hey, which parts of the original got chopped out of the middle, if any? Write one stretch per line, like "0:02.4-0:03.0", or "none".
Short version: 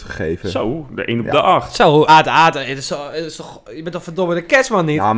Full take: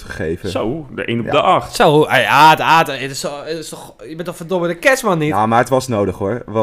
0:02.1-0:02.4